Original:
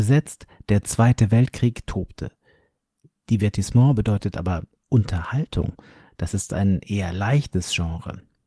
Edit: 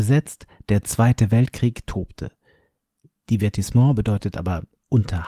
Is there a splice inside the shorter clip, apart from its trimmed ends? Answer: no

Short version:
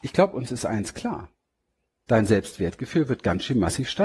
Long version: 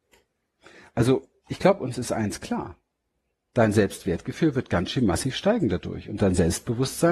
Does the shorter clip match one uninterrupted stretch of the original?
yes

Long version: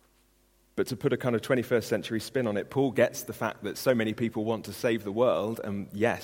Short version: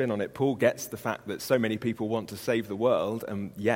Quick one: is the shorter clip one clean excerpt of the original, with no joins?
yes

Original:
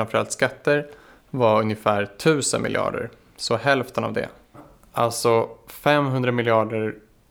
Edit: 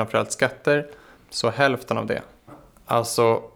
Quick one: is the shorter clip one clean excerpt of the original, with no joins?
no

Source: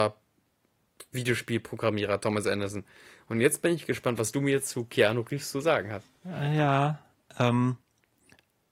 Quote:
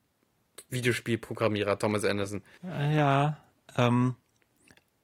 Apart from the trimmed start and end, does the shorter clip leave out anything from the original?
yes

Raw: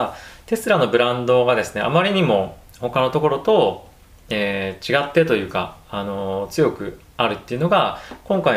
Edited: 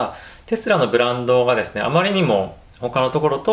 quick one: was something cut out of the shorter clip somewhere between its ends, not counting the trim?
no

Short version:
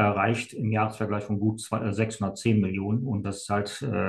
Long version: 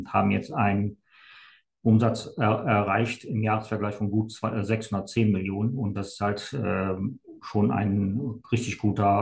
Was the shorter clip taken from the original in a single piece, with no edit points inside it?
yes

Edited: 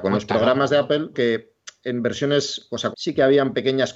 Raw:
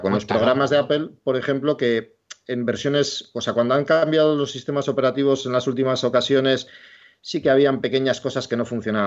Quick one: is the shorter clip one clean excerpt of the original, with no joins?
no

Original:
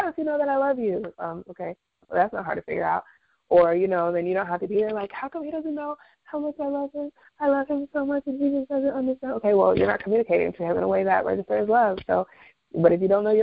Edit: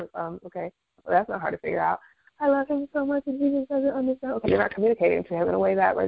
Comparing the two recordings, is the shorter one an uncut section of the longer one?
no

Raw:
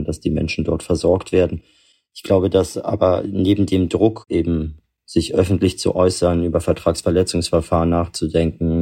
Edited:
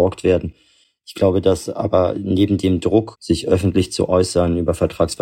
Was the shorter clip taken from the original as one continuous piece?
no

